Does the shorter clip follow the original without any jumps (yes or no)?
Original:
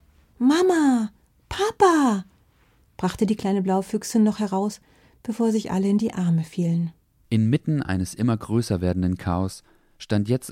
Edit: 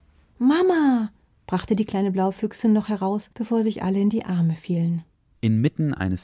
no